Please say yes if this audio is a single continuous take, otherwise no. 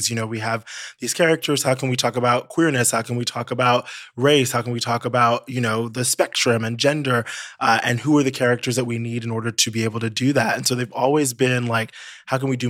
yes